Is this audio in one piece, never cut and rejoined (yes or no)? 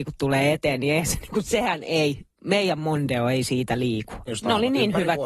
no